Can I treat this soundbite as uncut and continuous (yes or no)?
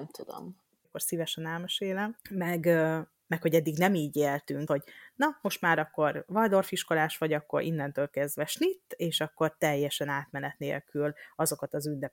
no